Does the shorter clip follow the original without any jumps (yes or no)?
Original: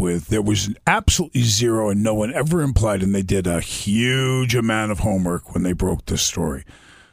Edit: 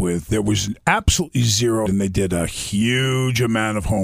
no